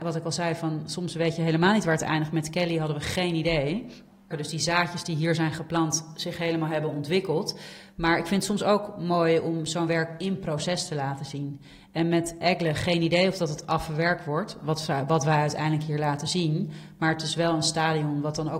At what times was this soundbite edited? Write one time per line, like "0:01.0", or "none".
0:04.3